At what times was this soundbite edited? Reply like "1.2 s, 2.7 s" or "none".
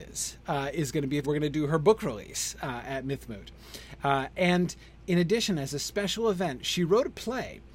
1.2 s